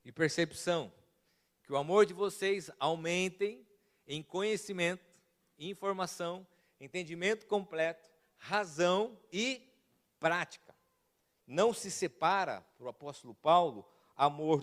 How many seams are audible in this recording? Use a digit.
1